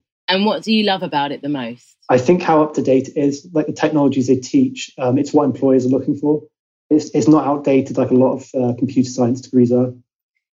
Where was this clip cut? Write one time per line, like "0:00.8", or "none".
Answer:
none